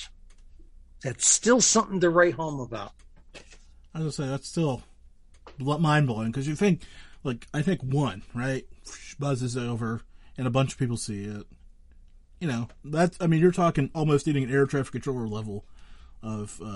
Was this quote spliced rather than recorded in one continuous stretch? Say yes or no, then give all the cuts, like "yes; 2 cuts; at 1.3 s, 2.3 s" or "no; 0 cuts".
no; 0 cuts